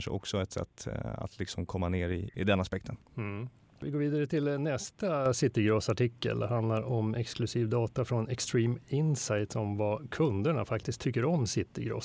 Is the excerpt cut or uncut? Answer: uncut